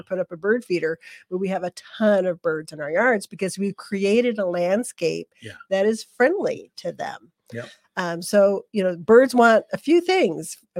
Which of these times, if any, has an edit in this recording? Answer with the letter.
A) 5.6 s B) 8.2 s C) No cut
C